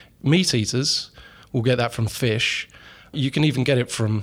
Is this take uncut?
no; 1 cut; at 3.1 s

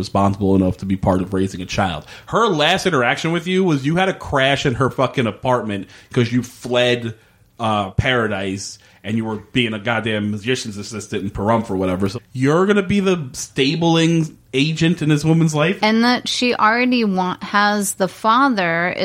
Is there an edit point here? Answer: yes; 2 cuts; at 12.1 s, 15.8 s

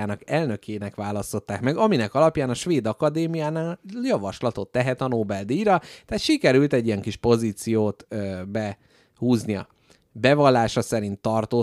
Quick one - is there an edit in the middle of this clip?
no; 0 cuts

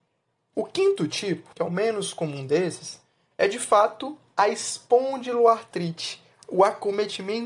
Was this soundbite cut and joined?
yes; 1 cut; at 1.5 s

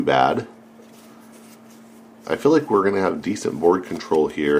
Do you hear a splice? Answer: yes; 1 cut; at 2.2 s

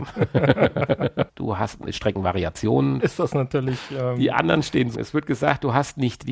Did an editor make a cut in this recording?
yes; 3 cuts; at 1.3 s, 3.0 s, 4.9 s

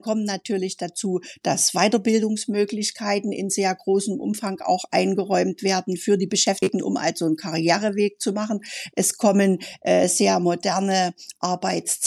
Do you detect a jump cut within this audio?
no; 0 cuts

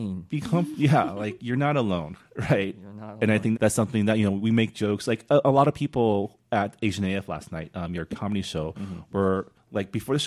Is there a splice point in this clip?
yes; 1 cut; at 3.5 s

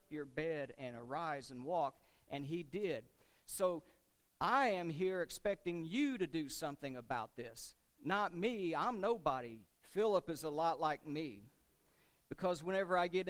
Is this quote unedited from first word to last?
no; 1 cut; at 9.6 s

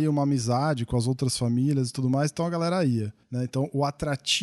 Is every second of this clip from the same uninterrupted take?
yes; 0 cuts

